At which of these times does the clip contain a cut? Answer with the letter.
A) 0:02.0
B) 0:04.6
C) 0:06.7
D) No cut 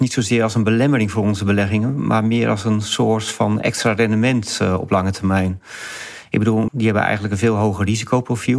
C